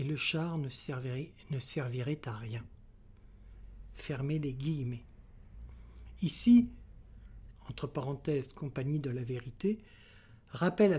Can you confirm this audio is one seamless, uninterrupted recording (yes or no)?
no